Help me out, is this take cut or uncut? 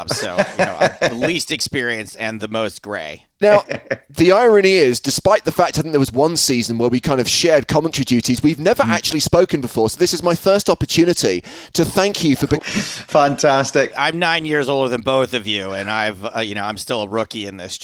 cut